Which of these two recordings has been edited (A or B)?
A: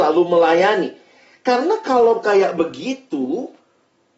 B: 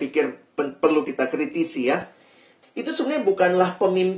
B